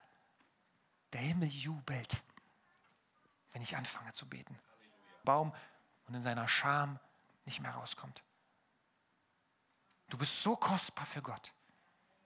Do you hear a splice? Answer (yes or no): yes